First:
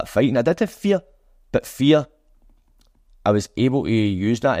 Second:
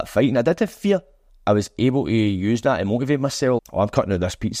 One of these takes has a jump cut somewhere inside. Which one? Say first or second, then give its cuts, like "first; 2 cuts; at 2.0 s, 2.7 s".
second; 2 cuts; at 1.3 s, 3.6 s